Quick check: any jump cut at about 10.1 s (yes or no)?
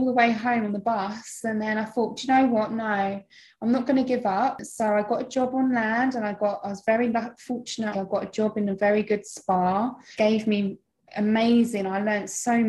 yes